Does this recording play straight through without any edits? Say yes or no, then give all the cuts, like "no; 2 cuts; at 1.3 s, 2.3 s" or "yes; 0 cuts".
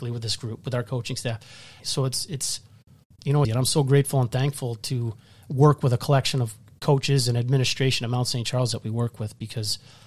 no; 2 cuts; at 1.8 s, 3.4 s